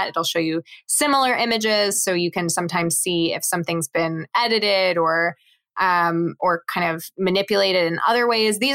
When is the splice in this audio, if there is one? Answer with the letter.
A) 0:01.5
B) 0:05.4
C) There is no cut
C